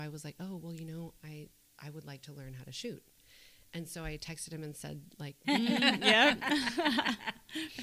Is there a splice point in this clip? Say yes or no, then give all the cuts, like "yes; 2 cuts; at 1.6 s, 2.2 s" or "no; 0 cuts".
yes; 1 cut; at 5.4 s